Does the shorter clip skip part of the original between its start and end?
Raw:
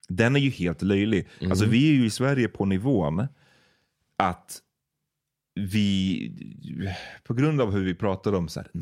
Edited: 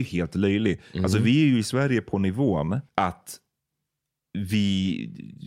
yes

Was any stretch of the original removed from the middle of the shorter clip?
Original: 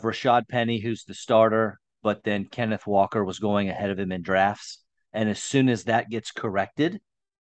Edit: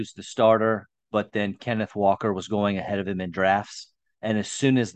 no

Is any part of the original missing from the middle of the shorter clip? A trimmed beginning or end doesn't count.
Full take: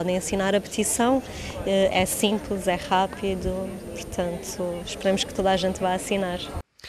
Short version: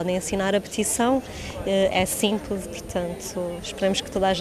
yes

